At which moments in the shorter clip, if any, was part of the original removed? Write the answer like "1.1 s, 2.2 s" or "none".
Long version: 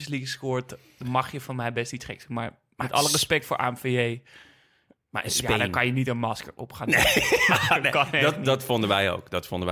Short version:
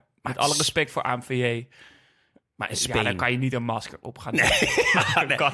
none